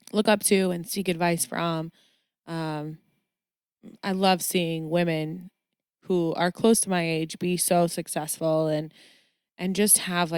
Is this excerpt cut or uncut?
uncut